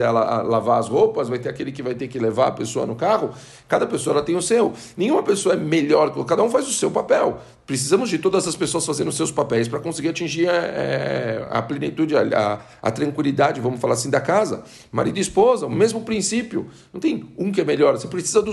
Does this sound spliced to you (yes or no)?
no